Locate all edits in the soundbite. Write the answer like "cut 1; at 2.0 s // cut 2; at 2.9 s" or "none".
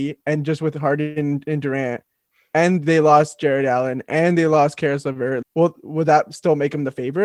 cut 1; at 5.4 s